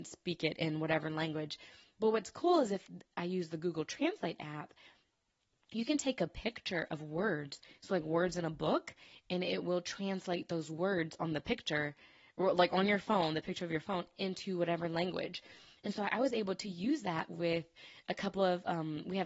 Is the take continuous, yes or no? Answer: yes